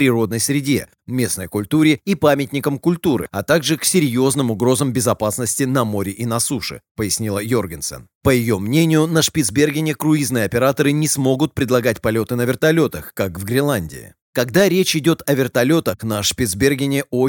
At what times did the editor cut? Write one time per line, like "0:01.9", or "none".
none